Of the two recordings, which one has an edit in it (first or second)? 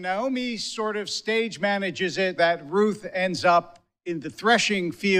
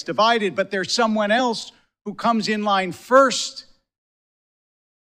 first